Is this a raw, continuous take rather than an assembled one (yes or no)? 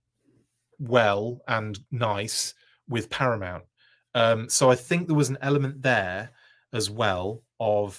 yes